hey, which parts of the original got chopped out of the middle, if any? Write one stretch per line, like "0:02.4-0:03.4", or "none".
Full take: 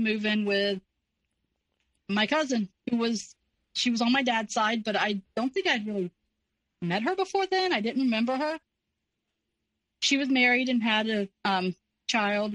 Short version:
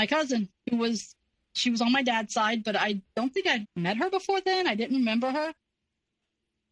0:05.8-0:06.7